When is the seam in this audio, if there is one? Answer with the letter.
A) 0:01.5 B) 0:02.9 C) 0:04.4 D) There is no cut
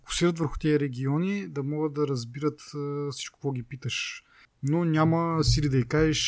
C